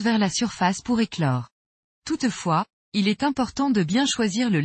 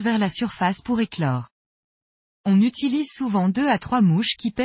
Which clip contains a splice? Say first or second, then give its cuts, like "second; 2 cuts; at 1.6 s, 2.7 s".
first; 1 cut; at 1.9 s